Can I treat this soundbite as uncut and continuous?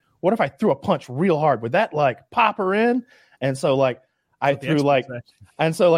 yes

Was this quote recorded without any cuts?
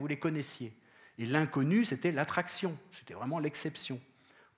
yes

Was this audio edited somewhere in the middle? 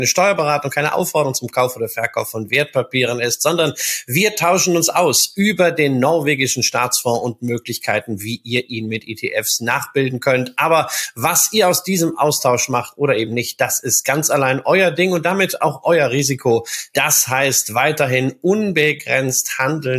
yes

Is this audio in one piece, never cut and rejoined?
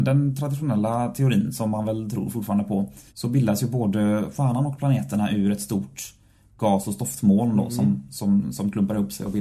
no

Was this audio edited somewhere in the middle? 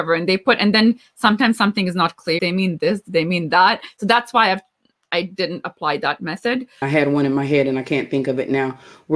yes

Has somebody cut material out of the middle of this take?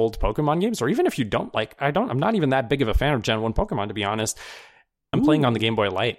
yes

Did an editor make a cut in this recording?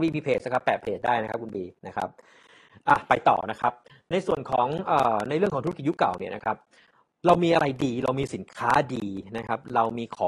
no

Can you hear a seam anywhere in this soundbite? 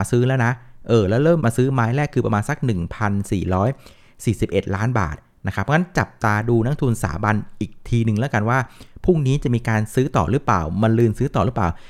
yes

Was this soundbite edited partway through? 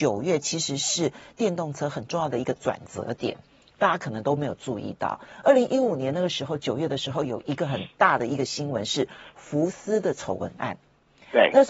no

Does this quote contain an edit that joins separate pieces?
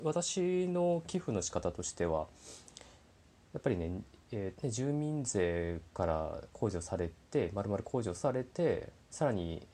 yes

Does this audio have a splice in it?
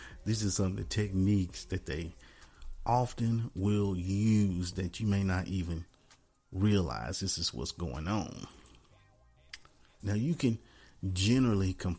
yes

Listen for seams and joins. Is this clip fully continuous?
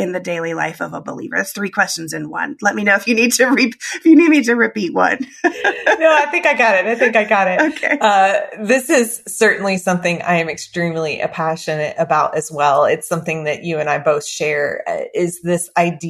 yes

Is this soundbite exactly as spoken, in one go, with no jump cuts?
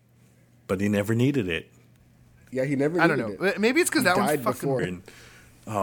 no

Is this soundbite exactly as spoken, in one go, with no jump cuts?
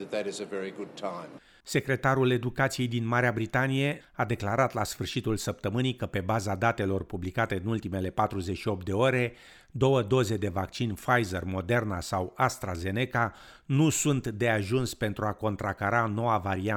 no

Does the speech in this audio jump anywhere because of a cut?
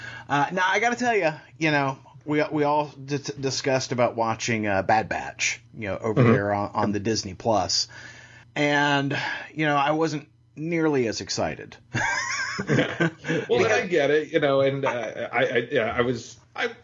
no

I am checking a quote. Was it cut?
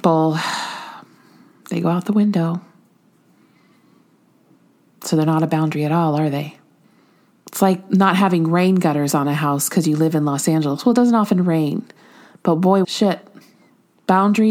yes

